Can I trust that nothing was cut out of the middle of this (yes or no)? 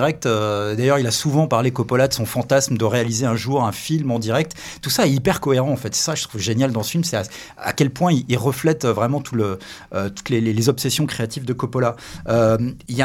yes